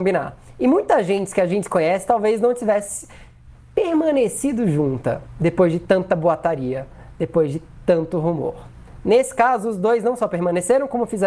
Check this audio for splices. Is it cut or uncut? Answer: uncut